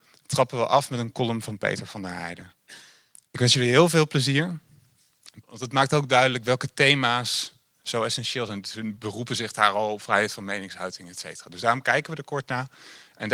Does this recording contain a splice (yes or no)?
yes